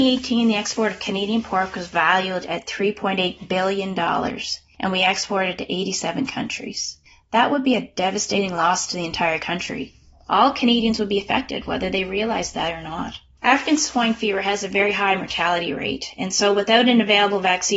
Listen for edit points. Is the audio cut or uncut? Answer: uncut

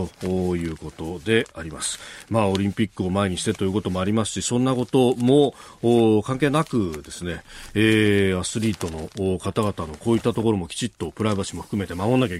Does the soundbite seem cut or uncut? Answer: uncut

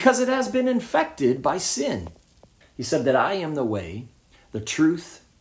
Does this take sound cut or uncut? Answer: cut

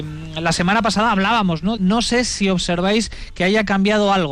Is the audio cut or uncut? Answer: cut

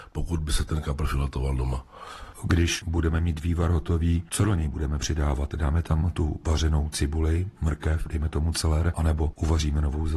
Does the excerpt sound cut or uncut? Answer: uncut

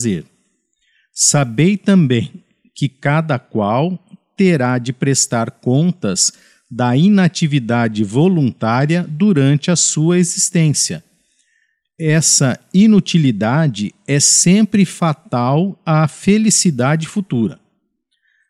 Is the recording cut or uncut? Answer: uncut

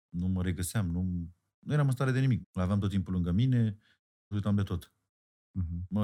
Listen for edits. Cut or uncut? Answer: cut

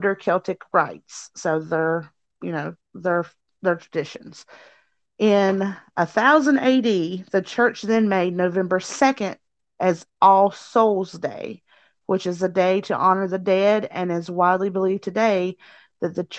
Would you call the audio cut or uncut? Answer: uncut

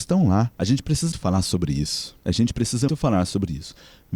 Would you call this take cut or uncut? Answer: cut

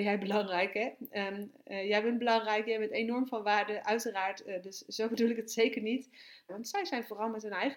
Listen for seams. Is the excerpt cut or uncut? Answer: cut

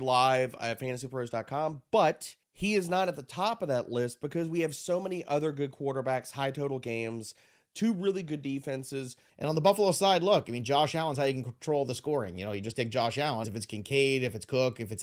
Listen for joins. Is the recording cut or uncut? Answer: cut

